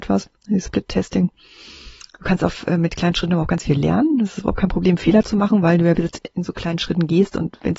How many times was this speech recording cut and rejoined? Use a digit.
1